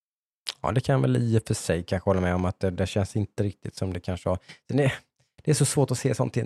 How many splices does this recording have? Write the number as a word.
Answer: zero